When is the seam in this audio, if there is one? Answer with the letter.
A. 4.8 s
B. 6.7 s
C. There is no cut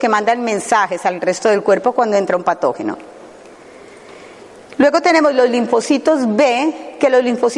C